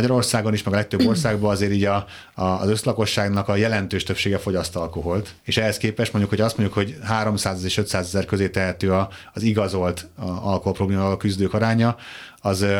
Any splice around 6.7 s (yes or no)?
no